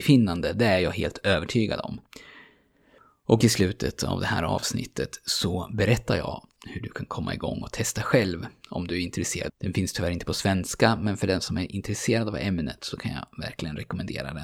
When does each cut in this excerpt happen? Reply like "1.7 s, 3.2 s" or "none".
9.5 s